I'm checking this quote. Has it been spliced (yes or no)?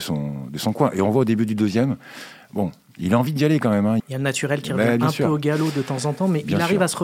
yes